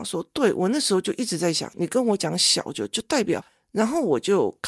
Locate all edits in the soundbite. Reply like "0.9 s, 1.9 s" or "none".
3.5 s